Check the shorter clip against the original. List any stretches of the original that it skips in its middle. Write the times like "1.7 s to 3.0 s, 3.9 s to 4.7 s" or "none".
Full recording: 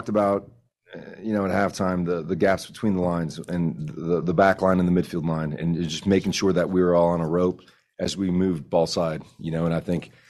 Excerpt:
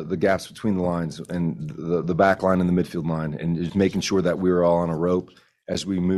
5.9 s to 6.0 s